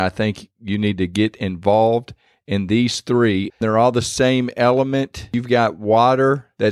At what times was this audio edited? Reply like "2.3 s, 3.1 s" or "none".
3.5 s